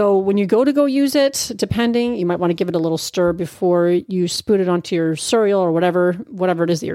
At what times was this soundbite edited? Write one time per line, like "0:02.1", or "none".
none